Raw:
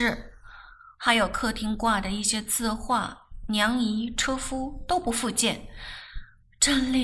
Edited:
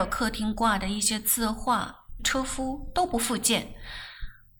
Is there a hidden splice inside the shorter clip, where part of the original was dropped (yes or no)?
yes